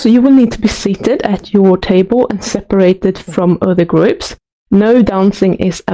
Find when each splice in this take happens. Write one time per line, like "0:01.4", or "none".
none